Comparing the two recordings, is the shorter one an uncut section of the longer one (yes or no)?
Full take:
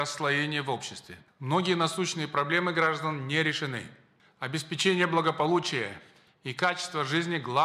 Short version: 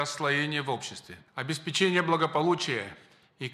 no